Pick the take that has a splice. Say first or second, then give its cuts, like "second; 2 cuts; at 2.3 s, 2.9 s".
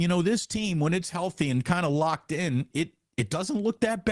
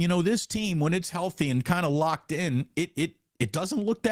first; 1 cut; at 2.7 s